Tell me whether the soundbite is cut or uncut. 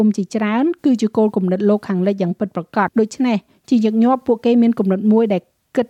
cut